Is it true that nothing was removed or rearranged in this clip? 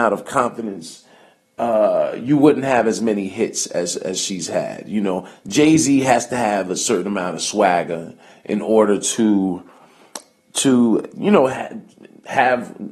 yes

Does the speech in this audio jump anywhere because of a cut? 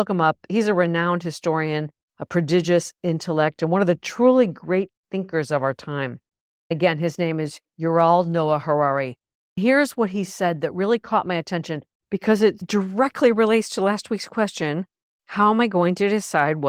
no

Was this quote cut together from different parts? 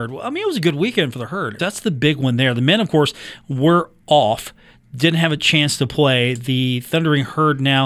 yes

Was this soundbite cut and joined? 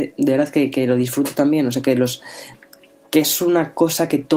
no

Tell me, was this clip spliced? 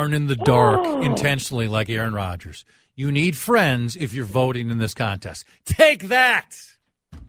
no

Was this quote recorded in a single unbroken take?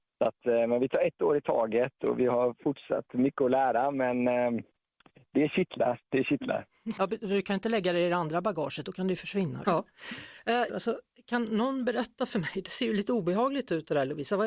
no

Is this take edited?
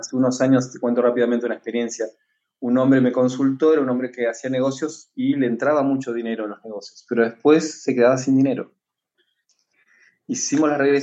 no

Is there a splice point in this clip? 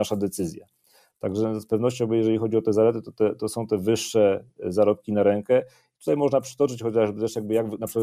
no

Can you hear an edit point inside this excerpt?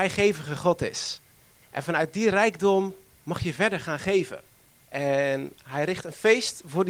yes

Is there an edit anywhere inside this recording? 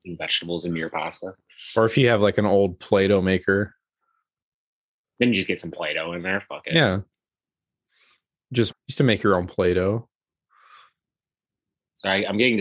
yes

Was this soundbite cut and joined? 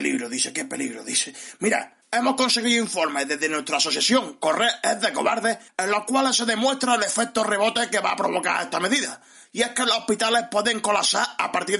no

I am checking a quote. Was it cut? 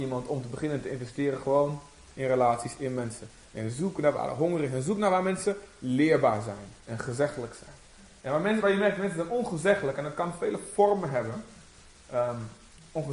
no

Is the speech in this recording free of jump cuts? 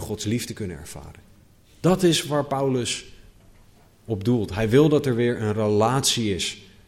no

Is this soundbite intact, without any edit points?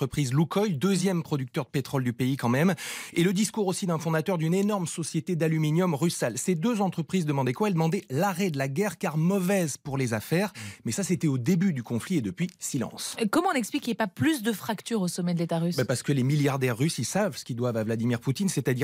yes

